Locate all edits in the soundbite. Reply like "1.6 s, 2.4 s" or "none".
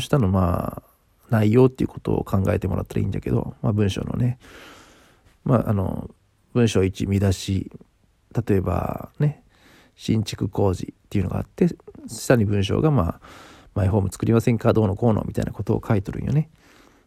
12.0 s